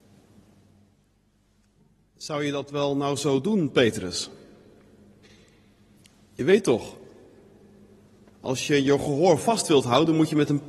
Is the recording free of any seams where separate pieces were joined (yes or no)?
yes